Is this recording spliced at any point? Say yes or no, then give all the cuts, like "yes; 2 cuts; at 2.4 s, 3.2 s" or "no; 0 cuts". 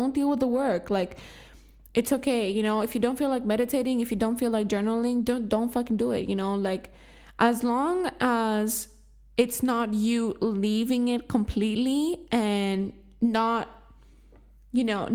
no; 0 cuts